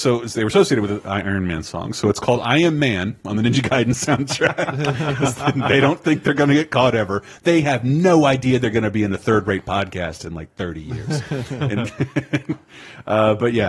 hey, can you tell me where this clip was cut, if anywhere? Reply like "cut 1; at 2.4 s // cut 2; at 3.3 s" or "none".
none